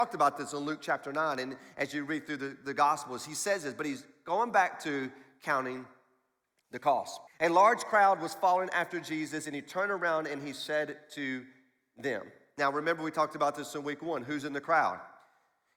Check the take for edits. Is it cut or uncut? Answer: cut